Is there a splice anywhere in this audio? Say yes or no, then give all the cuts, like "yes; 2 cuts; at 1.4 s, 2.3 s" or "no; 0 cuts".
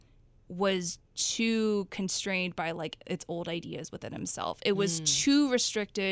no; 0 cuts